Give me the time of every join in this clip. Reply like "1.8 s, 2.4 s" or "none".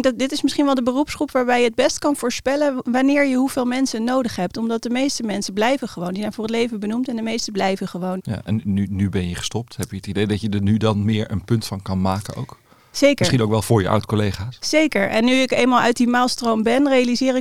8.2 s